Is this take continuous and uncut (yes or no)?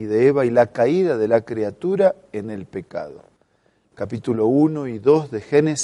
yes